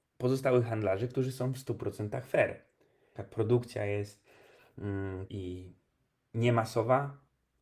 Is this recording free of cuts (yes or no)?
no